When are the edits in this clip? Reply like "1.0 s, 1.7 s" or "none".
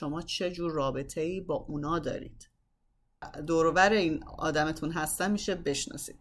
3.2 s